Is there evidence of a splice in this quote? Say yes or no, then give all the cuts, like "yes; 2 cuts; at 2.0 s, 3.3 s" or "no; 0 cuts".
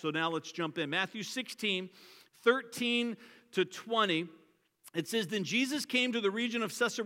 no; 0 cuts